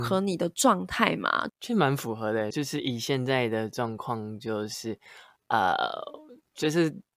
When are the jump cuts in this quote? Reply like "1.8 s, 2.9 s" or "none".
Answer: 1.5 s, 2.5 s